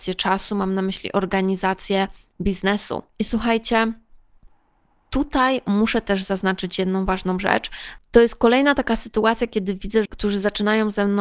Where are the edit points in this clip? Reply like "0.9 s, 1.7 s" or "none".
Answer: 8.0 s, 10.1 s